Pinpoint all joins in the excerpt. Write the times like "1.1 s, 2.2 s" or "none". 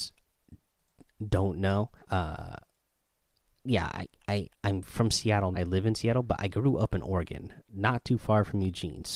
2.0 s, 5.5 s